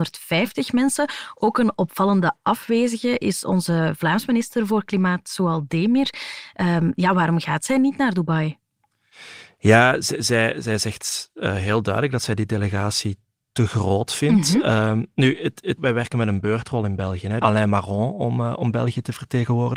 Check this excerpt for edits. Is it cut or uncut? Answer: cut